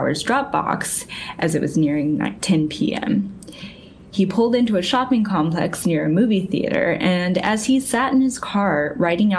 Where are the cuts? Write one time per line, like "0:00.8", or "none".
none